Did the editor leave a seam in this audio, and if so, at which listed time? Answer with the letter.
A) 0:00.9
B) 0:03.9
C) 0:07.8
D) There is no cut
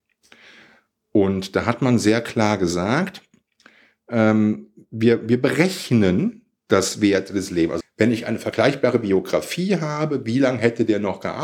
C